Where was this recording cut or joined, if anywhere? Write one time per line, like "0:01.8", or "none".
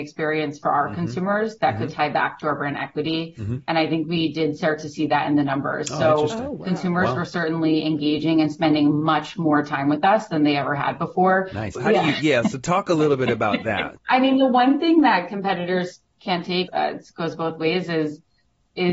0:11.8
0:14.0
0:16.7